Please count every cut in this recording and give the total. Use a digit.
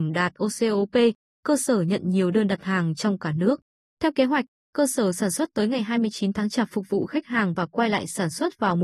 1